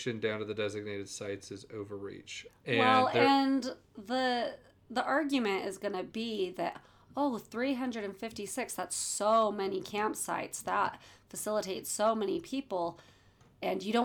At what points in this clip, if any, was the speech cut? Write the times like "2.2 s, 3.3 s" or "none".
2.5 s, 3.9 s